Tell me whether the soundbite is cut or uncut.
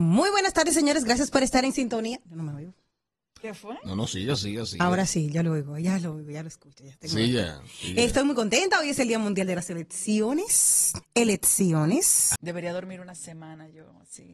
cut